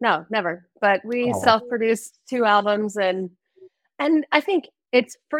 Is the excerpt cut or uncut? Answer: uncut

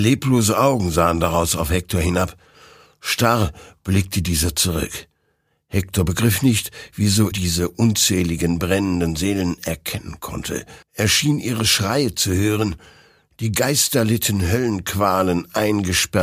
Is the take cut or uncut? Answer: cut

